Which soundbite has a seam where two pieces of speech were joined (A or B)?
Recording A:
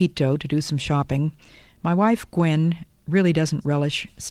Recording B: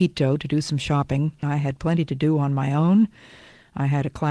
B